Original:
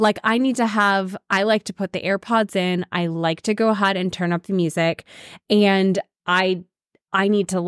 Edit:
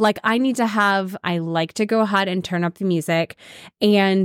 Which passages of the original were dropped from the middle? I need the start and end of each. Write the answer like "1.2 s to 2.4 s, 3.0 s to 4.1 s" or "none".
1.2 s to 2.9 s